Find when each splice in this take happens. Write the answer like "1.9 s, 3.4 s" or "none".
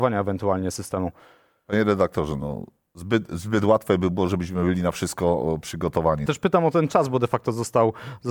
6.3 s